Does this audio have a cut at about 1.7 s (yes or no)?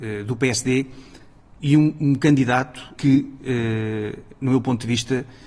no